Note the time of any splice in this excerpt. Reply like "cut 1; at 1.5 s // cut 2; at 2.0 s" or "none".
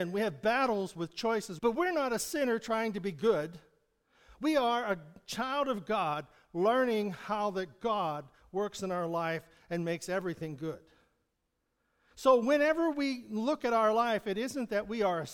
cut 1; at 1.6 s